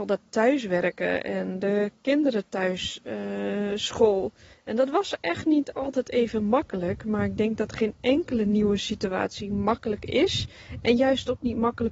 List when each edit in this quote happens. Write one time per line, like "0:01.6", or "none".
none